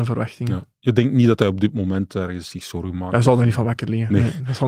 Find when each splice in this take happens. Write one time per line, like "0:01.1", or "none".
none